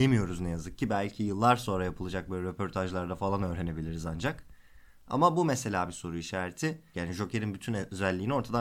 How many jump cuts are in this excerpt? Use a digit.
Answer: 1